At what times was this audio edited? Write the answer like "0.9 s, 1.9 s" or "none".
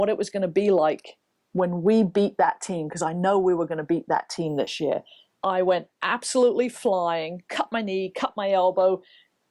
5.3 s, 7.5 s